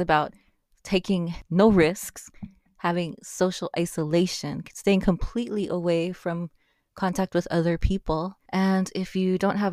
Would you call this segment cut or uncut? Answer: cut